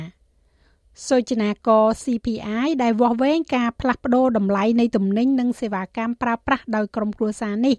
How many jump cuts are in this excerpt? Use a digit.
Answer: 0